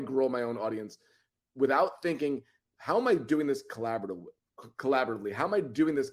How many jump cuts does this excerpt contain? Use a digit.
0